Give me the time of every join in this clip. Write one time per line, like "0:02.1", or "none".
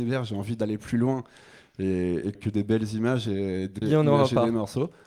0:02.3
0:03.8

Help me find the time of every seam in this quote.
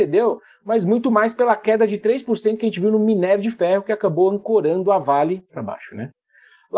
0:05.5

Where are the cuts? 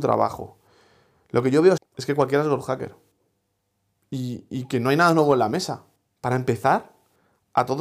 0:01.8
0:06.1

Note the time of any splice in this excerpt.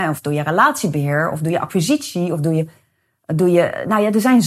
none

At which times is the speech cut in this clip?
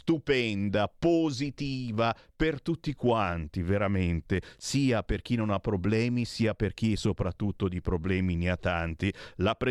none

